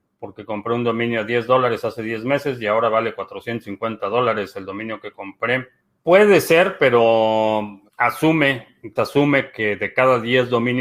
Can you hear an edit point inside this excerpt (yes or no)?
yes